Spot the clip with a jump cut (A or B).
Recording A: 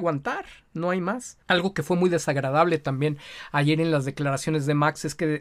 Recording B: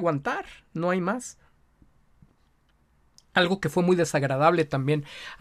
A